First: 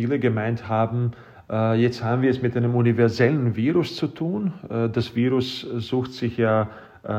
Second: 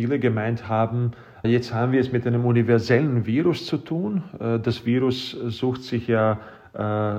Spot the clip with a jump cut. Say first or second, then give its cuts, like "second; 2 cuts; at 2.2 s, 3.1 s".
second; 1 cut; at 1.4 s